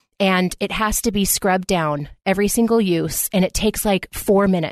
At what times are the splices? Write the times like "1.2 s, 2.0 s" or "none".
none